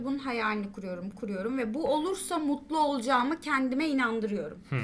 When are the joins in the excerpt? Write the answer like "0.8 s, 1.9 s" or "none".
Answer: 1.1 s